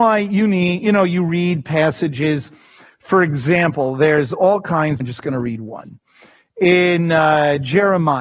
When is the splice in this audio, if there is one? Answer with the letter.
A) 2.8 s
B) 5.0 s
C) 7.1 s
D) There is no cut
B